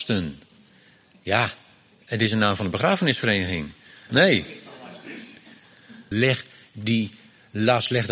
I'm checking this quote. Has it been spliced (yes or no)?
yes